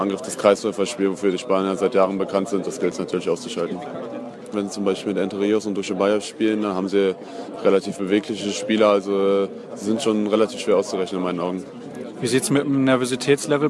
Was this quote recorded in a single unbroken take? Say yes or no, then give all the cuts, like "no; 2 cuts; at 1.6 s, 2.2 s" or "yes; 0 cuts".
no; 1 cut; at 4.5 s